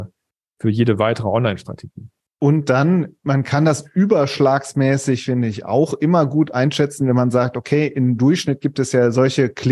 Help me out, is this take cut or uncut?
uncut